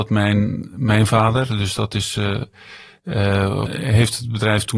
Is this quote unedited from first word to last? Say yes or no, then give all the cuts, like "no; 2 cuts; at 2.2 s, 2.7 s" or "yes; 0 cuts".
no; 1 cut; at 3.7 s